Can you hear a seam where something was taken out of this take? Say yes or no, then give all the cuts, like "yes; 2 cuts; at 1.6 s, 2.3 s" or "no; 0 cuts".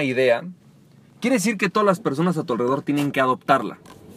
no; 0 cuts